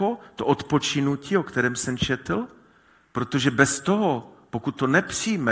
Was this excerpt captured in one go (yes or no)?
yes